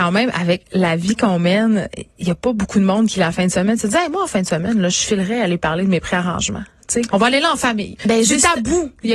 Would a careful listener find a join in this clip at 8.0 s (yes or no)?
yes